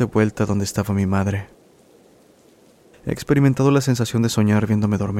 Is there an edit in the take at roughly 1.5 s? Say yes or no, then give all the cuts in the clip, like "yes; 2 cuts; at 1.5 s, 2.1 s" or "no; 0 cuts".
no; 1 cut; at 2.8 s